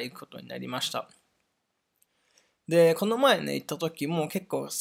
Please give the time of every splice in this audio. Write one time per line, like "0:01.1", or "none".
none